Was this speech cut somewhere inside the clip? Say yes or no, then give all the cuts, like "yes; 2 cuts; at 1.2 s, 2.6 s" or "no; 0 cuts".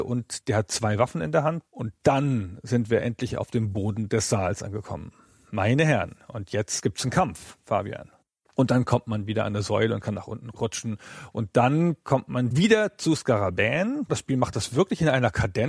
yes; 2 cuts; at 1.7 s, 8.4 s